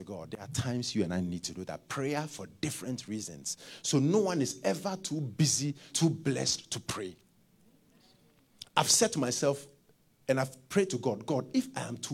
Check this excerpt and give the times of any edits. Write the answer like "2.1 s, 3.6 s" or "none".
5.9 s